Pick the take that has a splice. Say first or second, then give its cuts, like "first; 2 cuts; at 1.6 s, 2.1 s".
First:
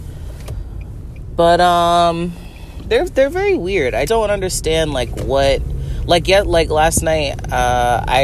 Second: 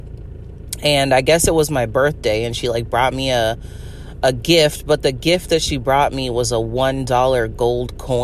first; 2 cuts; at 3.1 s, 4.1 s